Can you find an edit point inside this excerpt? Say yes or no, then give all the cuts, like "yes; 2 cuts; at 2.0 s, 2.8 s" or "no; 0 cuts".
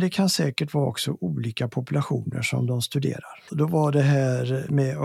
yes; 1 cut; at 3.5 s